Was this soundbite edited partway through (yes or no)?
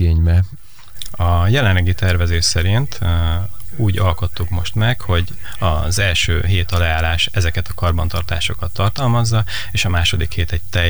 no